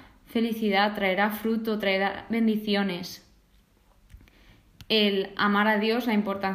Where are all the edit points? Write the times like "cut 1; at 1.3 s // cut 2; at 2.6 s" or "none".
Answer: none